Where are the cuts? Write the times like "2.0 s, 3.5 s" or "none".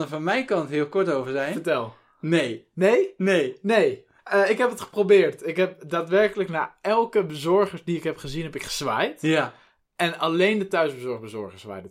4.2 s